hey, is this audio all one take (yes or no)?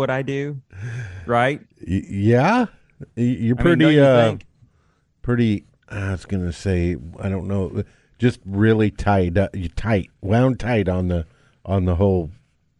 yes